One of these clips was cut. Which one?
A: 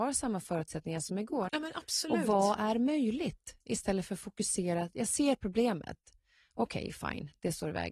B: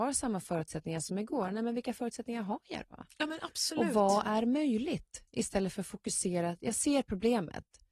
A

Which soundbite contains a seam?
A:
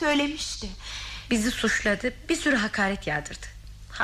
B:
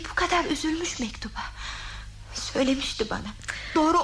A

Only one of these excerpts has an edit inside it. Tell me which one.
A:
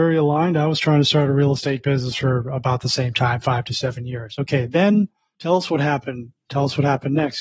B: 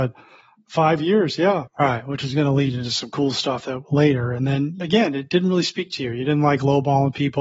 B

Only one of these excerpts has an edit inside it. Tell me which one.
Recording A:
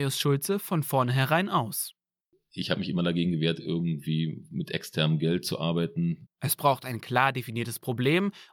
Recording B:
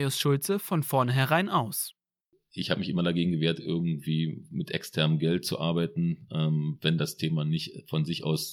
A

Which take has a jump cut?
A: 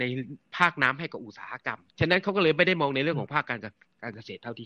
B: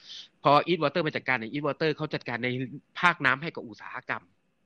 A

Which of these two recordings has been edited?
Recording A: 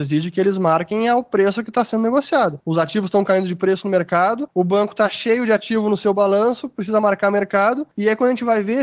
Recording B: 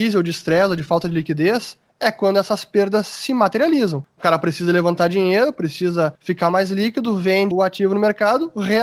B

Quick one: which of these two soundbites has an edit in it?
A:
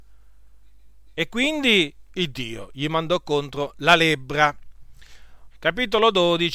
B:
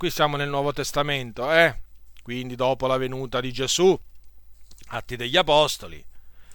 A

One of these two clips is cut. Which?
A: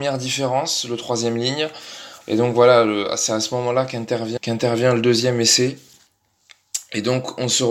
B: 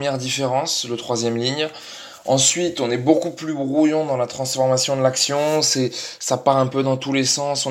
A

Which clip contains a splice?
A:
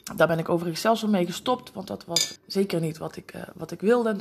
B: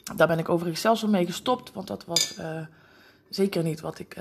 A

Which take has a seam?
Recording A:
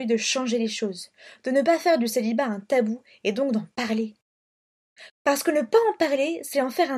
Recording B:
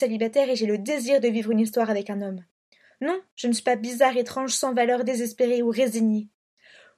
A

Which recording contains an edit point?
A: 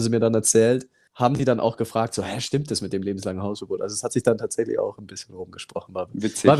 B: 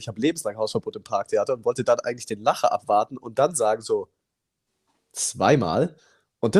A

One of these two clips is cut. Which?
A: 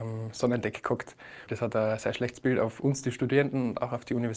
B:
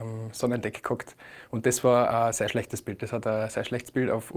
A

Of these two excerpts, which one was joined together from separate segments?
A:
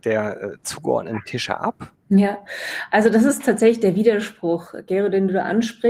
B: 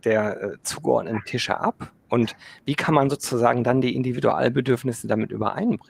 A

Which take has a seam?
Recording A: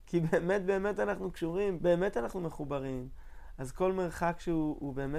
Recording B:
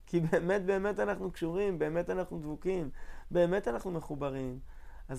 A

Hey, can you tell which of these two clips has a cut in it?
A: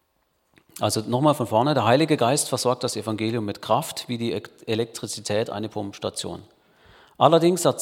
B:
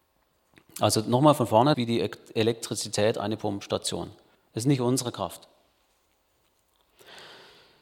B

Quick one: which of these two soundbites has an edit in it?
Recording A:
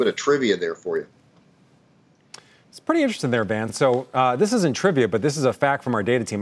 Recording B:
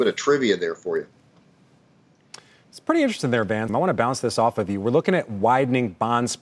B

